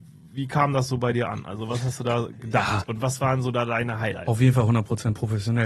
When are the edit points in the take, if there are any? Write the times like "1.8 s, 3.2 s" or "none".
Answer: 2.9 s